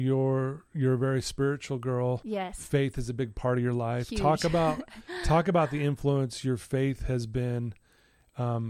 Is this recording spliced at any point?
no; 0 cuts

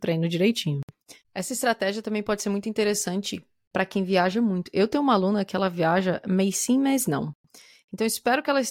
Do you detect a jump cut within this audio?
yes; 1 cut; at 1.2 s

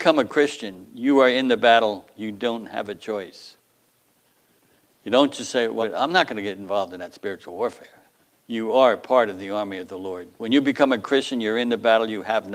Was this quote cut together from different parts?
yes; 2 cuts; at 5.8 s, 8.3 s

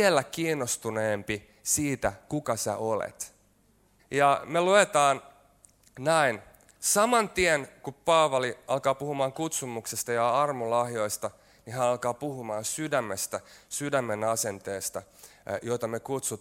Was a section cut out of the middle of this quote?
yes; 1 cut; at 4.0 s

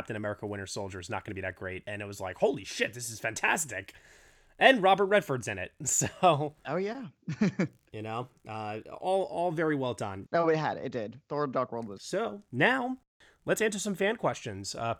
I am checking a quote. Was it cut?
yes; 2 cuts; at 10.2 s, 12.0 s

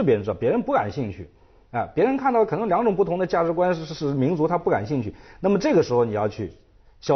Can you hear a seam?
no; 0 cuts

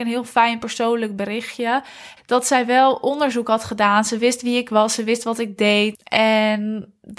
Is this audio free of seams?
no; 2 cuts; at 2.2 s, 5.9 s

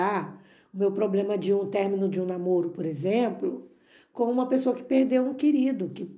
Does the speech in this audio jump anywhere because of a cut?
no; 0 cuts

